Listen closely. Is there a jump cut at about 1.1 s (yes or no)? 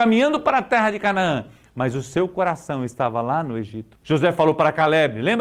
no